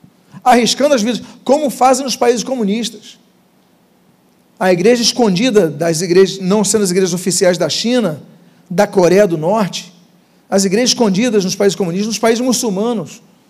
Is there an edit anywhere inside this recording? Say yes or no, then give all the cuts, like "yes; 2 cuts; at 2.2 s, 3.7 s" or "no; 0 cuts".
no; 0 cuts